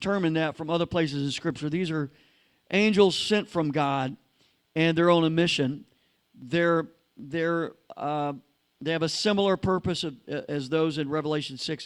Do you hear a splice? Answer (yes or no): no